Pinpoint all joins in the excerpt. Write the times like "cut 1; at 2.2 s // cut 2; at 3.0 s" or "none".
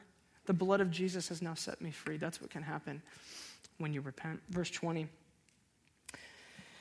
none